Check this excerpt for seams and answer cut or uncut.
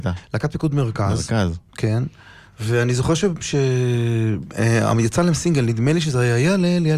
uncut